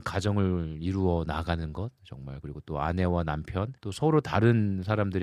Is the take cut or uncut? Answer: cut